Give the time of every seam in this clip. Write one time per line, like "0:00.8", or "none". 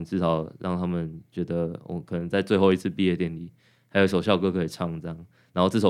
none